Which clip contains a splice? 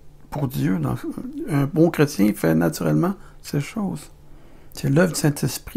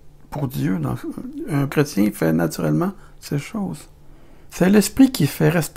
second; 2 cuts; at 1.7 s, 4.5 s

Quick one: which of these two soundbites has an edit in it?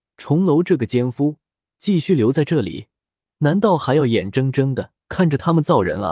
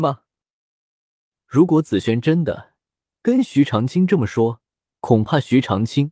first; 1 cut; at 5.0 s

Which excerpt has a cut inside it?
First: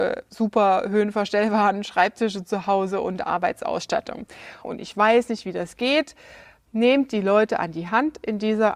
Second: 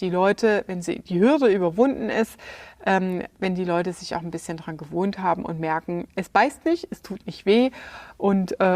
first; 1 cut; at 4.6 s

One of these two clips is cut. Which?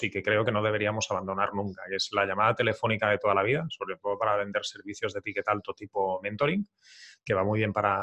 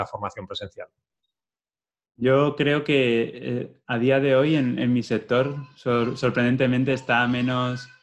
second; 1 cut; at 2.1 s

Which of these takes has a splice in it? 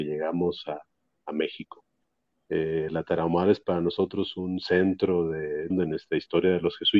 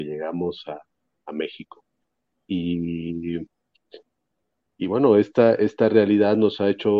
first; 2 cuts; at 2.5 s, 5.7 s

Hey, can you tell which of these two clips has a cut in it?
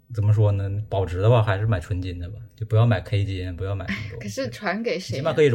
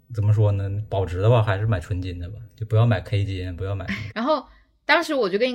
second; 1 cut; at 4.1 s

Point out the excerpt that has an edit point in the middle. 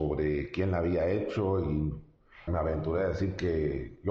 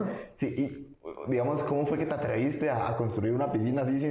first; 1 cut; at 2.5 s

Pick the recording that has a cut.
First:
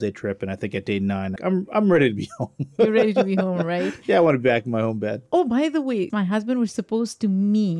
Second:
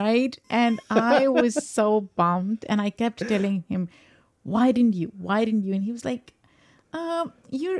first; 2 cuts; at 1.4 s, 6.1 s

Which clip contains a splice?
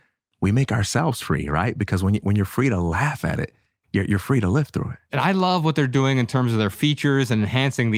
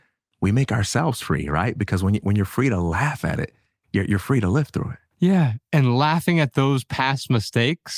first; 1 cut; at 5.1 s

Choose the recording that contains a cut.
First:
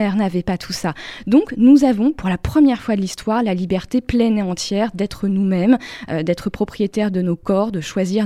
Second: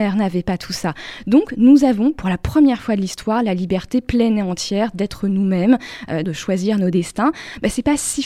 second; 1 cut; at 6.2 s

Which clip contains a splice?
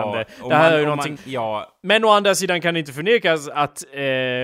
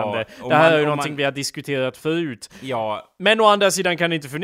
first; 1 cut; at 1.2 s

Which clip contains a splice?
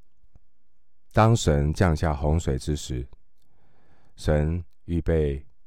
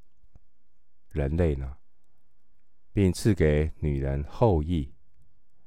second; 2 cuts; at 1.1 s, 2.9 s

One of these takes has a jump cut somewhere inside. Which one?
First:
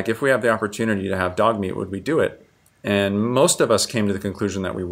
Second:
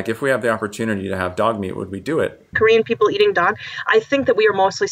second; 1 cut; at 2.5 s

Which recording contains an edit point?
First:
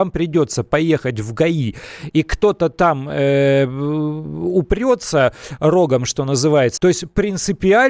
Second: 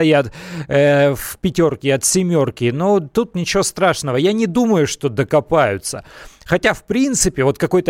first; 1 cut; at 6.8 s

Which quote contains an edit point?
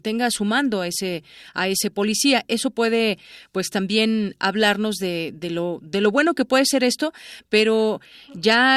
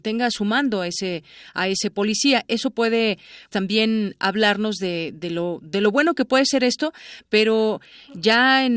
second; 1 cut; at 3.5 s

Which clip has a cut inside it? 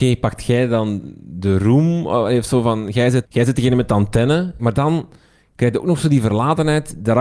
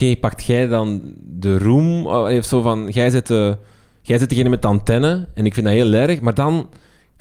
first; 2 cuts; at 3.2 s, 4.6 s

